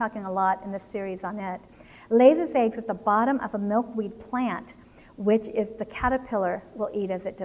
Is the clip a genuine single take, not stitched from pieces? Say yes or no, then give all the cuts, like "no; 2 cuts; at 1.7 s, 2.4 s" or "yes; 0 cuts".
yes; 0 cuts